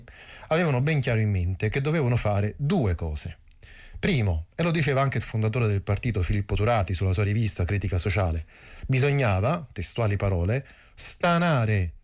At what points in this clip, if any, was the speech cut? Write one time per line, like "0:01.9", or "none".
none